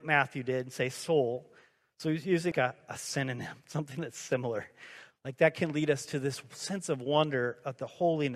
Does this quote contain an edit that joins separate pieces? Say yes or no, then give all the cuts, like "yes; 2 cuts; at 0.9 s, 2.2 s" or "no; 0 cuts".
yes; 2 cuts; at 2.5 s, 5.1 s